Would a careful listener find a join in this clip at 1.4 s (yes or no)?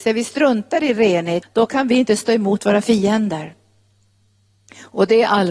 yes